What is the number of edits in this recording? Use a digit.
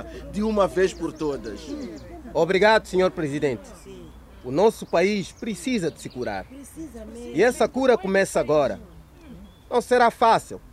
0